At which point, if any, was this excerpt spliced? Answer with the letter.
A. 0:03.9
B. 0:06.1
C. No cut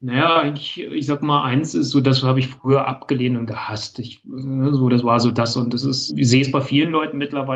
B